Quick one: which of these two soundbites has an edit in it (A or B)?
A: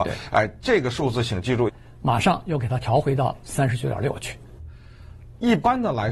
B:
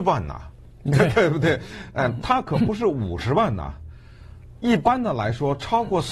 A